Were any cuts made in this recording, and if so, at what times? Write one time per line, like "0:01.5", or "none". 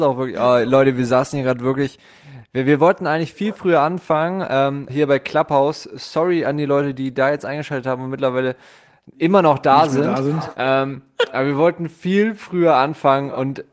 0:04.9

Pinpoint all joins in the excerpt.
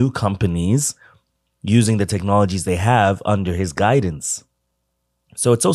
none

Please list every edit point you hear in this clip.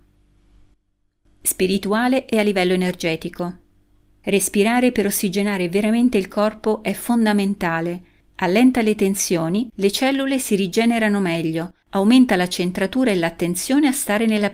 0:09.7

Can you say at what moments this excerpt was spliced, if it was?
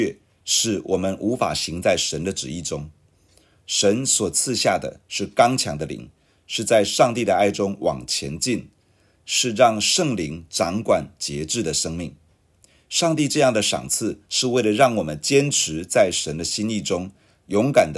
none

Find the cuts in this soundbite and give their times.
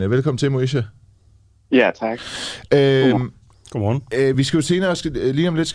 none

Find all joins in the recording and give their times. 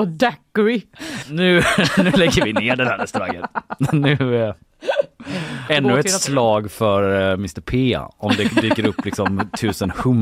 0:01.2
0:05.7

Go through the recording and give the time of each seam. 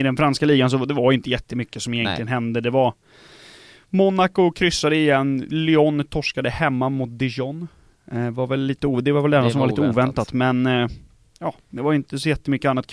0:11.6

